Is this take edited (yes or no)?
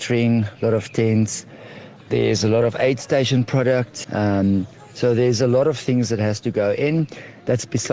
yes